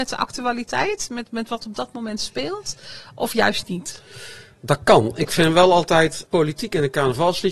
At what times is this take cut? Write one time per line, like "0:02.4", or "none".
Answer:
0:06.3